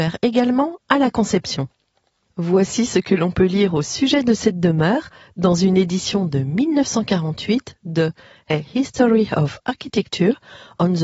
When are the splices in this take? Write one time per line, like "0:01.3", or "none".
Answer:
none